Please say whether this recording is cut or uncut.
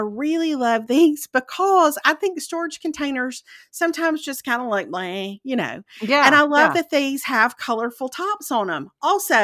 uncut